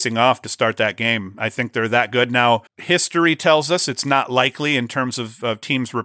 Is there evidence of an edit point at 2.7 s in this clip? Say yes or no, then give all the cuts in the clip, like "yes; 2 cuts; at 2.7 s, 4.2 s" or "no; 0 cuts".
yes; 1 cut; at 2.7 s